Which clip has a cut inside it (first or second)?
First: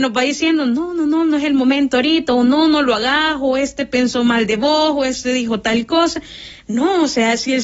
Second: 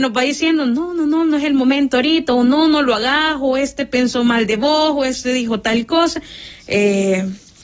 second